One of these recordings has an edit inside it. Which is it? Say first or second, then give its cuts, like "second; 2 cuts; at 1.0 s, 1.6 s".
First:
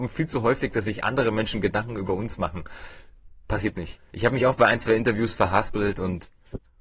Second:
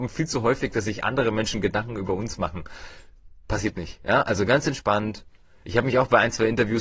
first; 1 cut; at 4.0 s